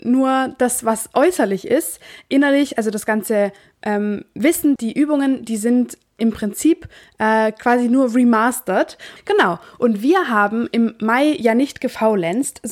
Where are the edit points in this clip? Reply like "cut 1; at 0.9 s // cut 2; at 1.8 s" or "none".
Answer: cut 1; at 4.8 s // cut 2; at 9.2 s